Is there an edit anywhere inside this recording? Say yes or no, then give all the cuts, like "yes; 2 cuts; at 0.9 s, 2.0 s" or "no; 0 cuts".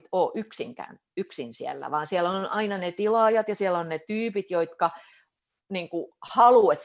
no; 0 cuts